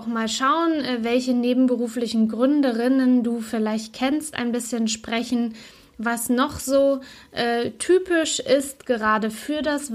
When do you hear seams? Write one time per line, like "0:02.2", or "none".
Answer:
none